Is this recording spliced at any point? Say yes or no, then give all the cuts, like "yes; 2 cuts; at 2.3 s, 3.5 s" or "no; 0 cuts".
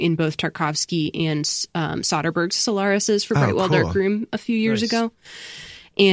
no; 0 cuts